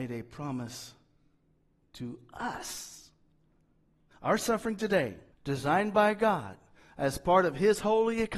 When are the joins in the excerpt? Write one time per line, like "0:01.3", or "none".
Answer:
0:04.1
0:05.3